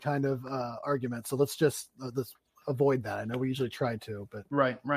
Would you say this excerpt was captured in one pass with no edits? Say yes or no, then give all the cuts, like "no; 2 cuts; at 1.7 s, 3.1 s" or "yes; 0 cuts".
yes; 0 cuts